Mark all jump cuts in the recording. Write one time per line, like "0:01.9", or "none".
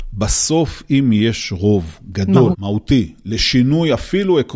0:02.5